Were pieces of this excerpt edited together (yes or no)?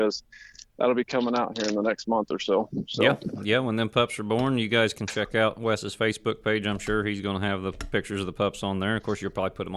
no